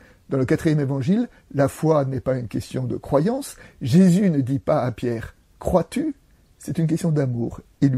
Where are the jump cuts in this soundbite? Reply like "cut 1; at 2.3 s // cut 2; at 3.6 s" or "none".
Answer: none